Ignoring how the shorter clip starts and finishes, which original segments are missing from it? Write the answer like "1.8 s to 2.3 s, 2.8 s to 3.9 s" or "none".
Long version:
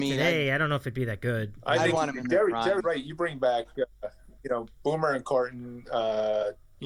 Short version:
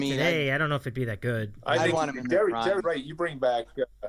none